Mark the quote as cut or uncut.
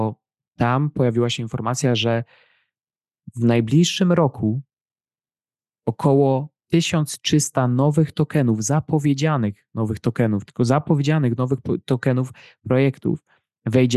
cut